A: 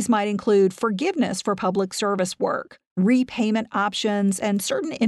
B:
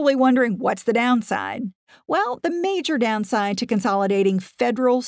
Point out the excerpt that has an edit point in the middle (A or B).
A